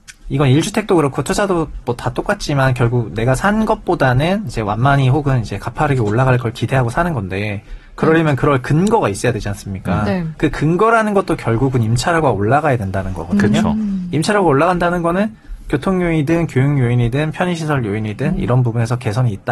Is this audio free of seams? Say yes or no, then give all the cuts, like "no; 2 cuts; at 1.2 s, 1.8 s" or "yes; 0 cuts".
yes; 0 cuts